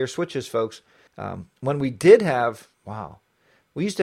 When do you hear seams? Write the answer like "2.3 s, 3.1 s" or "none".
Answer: 1.1 s, 2.7 s